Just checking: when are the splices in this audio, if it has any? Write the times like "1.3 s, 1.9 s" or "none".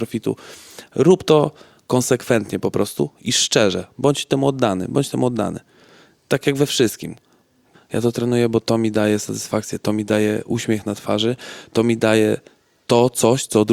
7.7 s